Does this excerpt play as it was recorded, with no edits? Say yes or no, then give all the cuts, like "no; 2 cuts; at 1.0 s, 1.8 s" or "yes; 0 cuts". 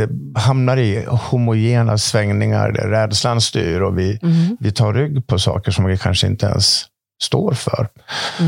yes; 0 cuts